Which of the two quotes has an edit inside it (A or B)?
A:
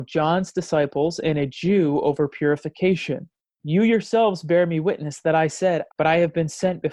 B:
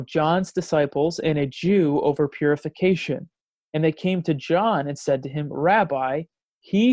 A